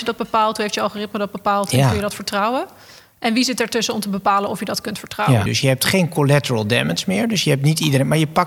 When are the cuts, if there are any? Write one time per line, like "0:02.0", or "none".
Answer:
0:05.5